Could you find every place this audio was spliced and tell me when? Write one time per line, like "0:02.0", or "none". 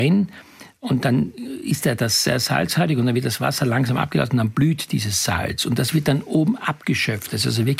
none